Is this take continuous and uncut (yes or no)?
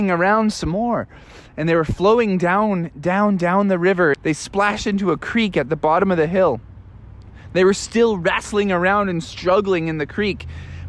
no